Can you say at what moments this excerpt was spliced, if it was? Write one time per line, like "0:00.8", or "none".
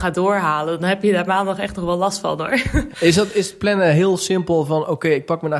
0:02.9